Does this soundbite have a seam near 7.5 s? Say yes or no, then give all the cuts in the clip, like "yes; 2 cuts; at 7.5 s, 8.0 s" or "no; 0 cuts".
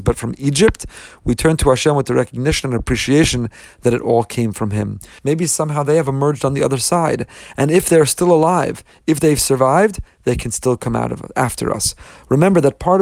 no; 1 cut; at 5.2 s